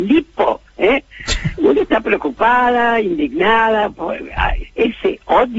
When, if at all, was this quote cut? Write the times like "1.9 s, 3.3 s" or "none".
1.6 s, 4.6 s